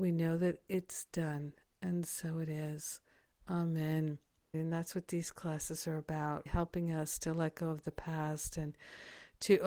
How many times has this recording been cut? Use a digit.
2